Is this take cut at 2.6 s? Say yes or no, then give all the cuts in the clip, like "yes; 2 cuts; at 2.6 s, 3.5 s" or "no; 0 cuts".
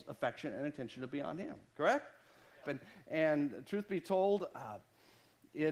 yes; 1 cut; at 2.6 s